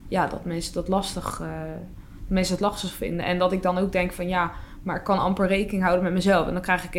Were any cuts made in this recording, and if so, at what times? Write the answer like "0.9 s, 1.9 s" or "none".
none